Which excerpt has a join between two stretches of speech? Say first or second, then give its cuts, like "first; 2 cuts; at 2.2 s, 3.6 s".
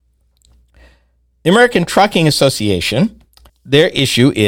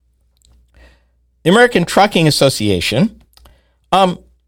first; 1 cut; at 3.5 s